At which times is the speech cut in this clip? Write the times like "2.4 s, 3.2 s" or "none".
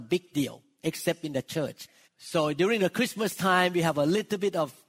2.0 s